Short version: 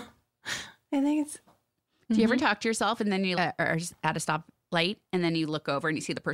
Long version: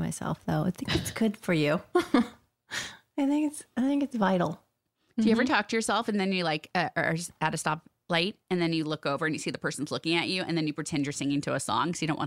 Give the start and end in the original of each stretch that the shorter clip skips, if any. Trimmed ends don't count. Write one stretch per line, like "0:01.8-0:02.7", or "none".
0:03.7-0:04.5
0:06.4-0:06.7